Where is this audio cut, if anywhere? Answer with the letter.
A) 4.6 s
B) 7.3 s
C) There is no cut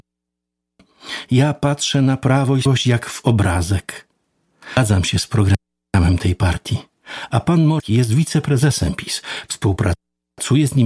C